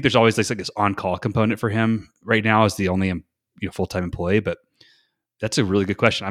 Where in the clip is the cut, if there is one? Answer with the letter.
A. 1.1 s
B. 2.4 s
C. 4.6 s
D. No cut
D